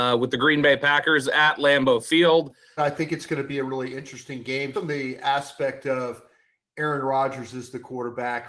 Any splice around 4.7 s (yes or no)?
yes